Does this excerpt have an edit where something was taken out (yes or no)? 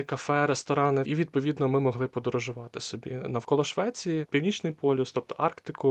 yes